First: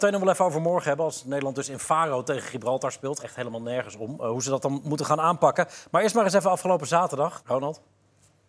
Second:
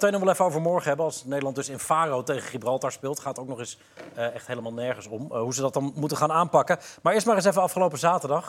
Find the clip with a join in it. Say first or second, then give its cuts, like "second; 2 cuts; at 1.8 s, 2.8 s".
first; 2 cuts; at 3.2 s, 7.4 s